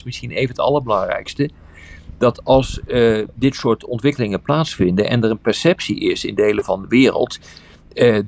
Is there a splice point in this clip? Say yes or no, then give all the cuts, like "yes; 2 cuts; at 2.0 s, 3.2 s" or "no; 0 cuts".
yes; 1 cut; at 3.3 s